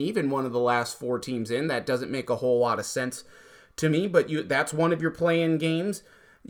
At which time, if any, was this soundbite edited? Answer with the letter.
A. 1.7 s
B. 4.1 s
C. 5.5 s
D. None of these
D